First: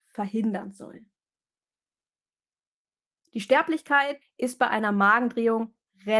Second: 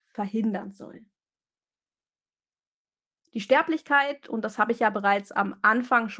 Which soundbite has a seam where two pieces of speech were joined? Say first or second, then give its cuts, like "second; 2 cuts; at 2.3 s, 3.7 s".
first; 1 cut; at 4.2 s